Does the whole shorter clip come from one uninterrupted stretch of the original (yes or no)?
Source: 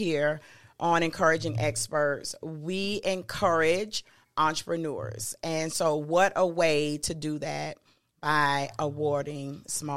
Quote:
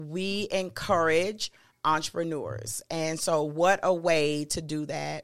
yes